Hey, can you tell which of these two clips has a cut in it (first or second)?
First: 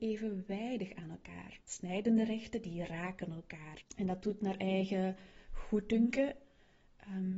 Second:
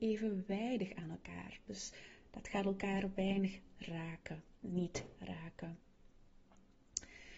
first